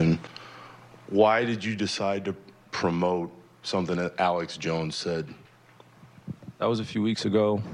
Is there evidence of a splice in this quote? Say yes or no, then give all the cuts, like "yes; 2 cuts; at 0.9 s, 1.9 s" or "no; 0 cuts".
yes; 1 cut; at 6.6 s